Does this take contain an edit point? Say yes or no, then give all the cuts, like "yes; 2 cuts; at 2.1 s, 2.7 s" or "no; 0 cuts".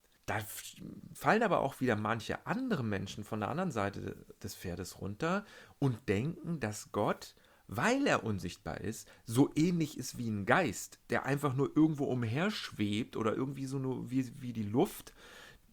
no; 0 cuts